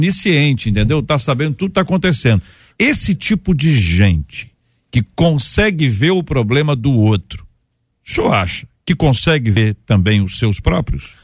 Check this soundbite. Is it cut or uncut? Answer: uncut